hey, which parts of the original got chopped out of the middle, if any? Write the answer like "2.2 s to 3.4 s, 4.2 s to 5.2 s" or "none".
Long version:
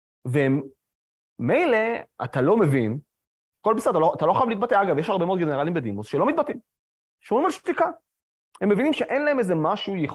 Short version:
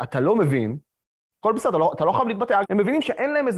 4.8 s to 8.5 s